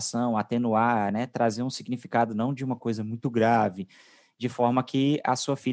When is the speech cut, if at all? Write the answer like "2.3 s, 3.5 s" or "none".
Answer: none